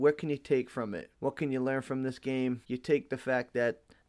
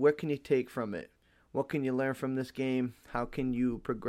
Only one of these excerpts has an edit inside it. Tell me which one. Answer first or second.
first